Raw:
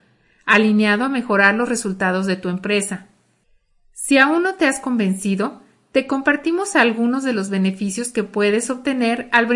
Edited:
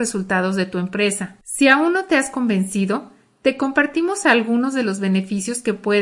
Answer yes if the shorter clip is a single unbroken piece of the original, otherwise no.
no